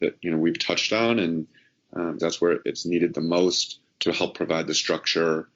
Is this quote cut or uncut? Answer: cut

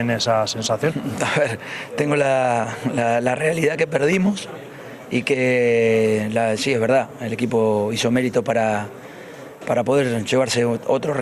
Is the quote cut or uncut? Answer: uncut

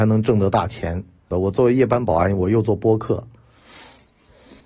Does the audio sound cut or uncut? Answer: cut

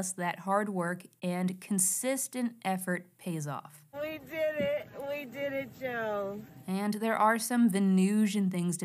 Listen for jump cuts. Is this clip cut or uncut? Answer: cut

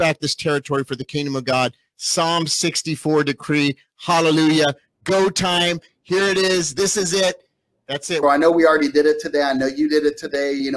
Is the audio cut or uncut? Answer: cut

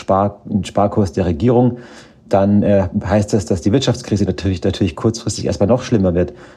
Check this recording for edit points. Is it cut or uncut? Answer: uncut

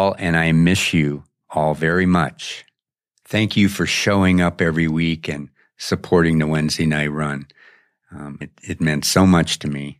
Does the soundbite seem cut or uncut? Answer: cut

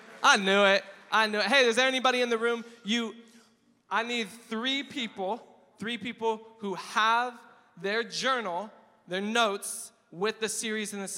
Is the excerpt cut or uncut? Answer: uncut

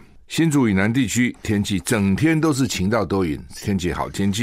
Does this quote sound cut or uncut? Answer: uncut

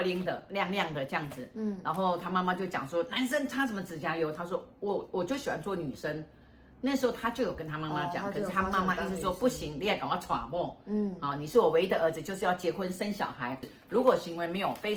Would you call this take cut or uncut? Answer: cut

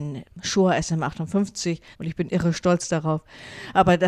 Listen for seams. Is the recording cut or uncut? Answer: cut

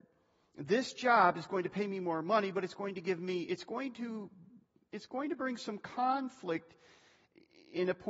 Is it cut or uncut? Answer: uncut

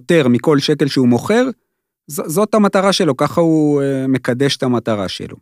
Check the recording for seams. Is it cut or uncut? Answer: uncut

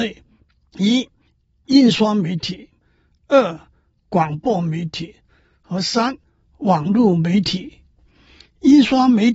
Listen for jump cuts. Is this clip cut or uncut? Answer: uncut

